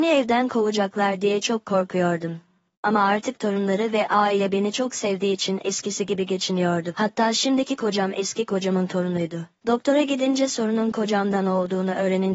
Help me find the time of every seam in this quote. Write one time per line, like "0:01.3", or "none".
0:09.6